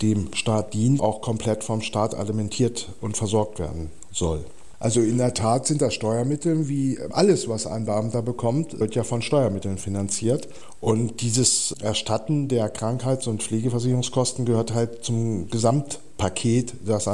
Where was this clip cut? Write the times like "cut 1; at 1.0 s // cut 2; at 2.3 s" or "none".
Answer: cut 1; at 1.0 s // cut 2; at 4.7 s